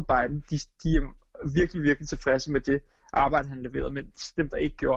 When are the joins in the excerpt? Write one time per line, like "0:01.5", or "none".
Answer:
none